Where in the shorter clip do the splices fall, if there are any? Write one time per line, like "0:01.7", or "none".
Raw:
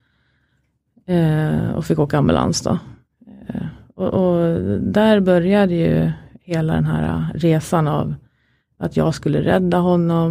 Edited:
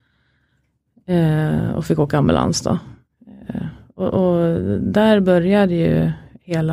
none